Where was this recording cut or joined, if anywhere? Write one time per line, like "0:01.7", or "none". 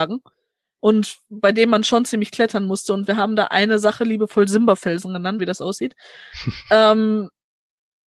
0:05.4